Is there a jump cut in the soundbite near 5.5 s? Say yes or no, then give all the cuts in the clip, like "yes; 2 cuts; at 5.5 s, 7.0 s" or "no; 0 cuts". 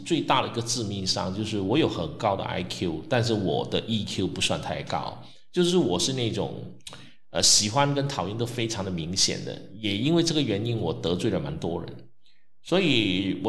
no; 0 cuts